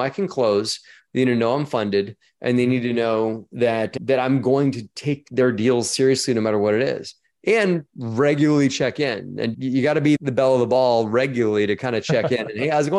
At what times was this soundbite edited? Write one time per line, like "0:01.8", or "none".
none